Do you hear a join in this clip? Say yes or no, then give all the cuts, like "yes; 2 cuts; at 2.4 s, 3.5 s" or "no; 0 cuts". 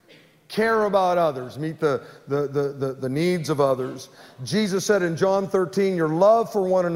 no; 0 cuts